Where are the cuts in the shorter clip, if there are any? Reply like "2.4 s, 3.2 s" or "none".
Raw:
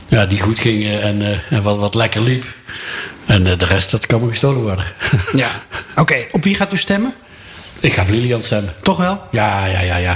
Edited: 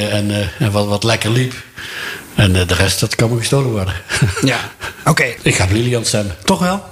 5.4 s